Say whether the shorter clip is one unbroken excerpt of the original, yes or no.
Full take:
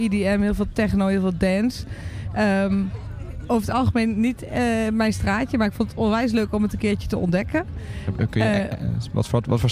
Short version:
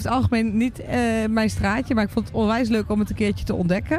yes